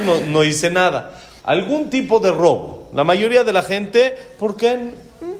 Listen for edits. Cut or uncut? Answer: cut